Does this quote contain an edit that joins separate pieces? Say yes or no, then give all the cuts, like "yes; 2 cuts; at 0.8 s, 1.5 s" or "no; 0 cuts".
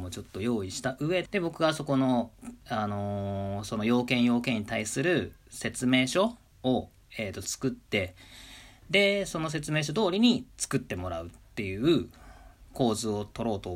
yes; 1 cut; at 1.2 s